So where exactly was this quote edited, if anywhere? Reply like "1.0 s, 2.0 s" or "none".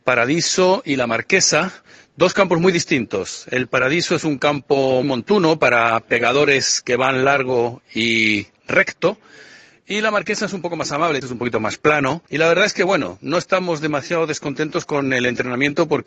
5.0 s, 11.2 s, 12.3 s